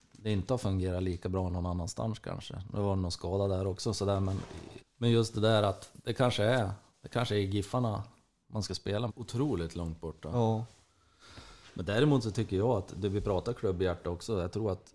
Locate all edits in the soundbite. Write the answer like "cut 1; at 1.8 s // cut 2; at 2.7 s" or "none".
cut 1; at 4.8 s // cut 2; at 9.1 s